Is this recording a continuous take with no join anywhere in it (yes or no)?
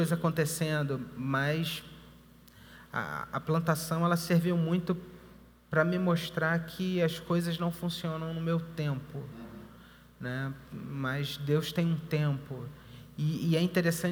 yes